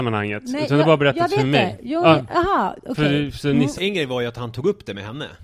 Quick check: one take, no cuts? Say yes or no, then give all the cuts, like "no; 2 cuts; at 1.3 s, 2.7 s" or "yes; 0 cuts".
no; 1 cut; at 3.7 s